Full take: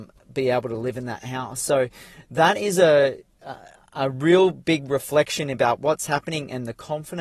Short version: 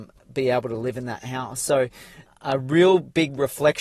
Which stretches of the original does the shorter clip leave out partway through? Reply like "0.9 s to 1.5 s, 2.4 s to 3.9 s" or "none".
2.3 s to 3.8 s